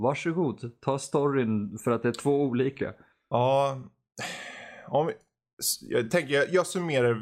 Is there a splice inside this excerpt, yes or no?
no